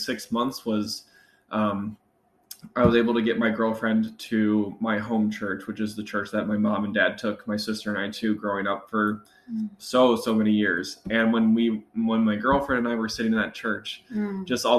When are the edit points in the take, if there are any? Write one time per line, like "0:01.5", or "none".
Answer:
none